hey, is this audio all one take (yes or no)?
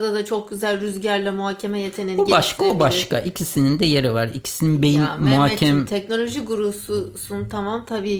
yes